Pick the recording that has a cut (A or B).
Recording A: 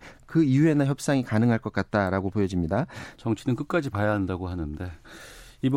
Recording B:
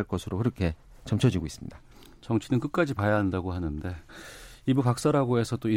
A